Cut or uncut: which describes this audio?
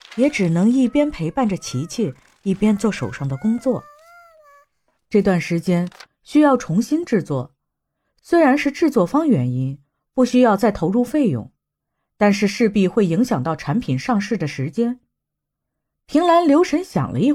cut